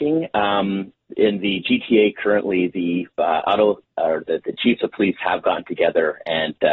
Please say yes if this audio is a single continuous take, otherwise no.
yes